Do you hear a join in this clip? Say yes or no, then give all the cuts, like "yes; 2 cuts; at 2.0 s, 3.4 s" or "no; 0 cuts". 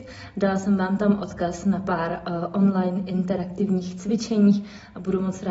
no; 0 cuts